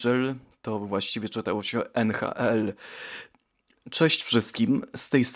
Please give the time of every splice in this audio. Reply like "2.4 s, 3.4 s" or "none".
3.8 s

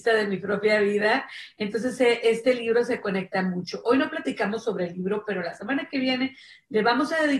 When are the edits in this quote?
none

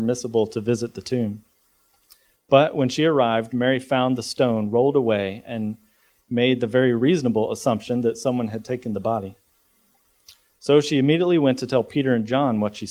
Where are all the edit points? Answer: none

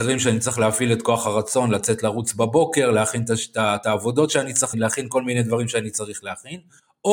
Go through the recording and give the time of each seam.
4.7 s

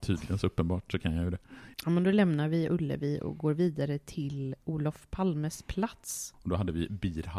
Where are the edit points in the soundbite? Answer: 1.7 s, 6.3 s

